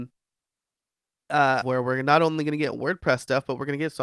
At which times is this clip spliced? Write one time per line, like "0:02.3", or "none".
0:01.6